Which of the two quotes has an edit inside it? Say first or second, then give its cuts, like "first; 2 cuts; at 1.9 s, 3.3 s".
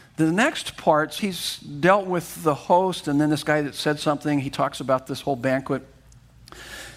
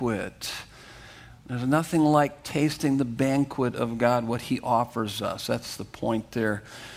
first; 1 cut; at 1.2 s